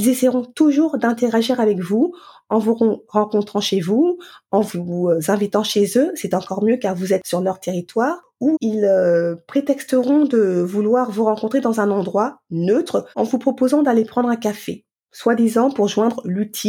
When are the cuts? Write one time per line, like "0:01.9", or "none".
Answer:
0:08.5
0:13.1